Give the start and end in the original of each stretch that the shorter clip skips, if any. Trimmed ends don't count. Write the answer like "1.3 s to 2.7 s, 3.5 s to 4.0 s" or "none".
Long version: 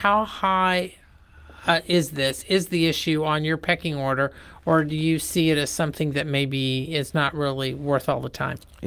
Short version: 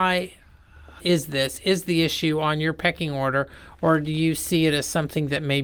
1.6 s to 1.8 s